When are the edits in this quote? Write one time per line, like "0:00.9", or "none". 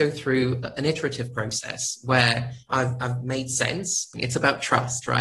0:02.7
0:04.1

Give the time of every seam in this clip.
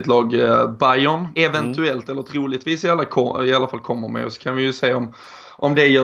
0:01.4

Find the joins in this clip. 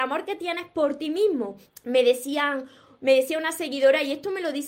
0:01.7

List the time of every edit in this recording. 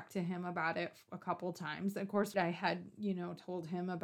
0:02.3

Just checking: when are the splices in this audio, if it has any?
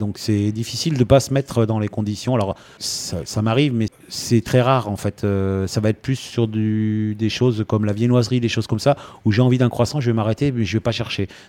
0:02.8
0:03.9

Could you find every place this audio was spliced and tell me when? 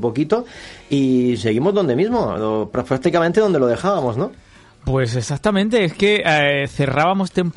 none

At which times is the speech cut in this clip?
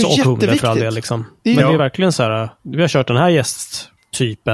none

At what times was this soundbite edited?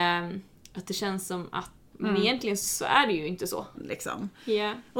0:01.9
0:03.7

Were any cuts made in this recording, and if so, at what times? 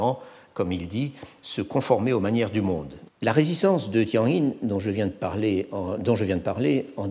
0:03.1

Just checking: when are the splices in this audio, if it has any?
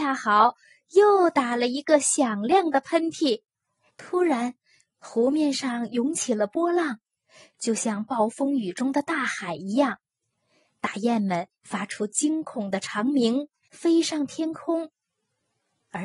0:03.9
0:13.6

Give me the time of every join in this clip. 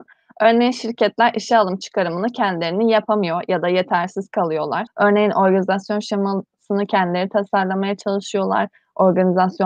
0:04.9

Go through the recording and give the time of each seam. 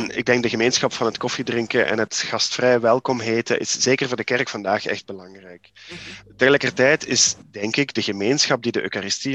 none

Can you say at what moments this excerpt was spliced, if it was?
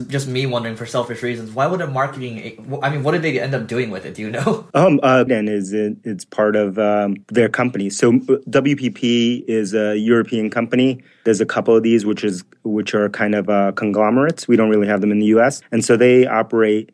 0:05.3

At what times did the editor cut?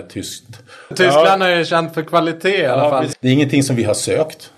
0:00.9
0:03.1

